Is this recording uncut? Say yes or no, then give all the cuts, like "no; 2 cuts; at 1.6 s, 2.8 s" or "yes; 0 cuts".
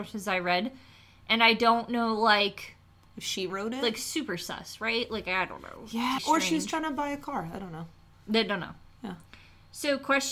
no; 1 cut; at 6.2 s